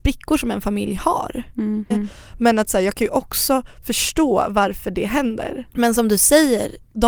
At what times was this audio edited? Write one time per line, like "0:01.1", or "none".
0:01.9